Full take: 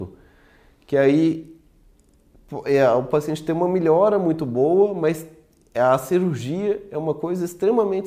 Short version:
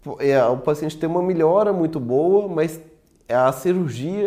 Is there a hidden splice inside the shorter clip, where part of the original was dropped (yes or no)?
no